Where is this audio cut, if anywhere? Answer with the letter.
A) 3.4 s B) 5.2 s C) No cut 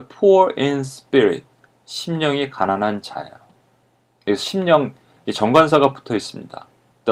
B